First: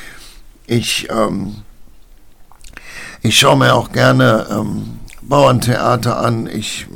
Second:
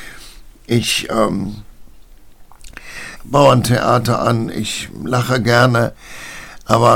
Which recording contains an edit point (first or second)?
second